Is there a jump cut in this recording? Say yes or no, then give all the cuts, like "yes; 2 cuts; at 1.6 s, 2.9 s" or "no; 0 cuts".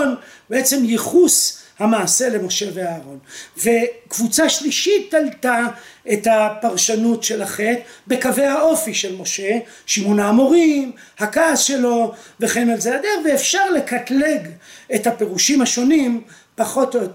no; 0 cuts